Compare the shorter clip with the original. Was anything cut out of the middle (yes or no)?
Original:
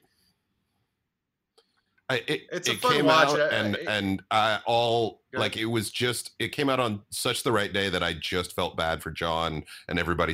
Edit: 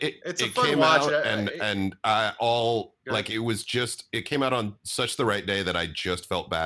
no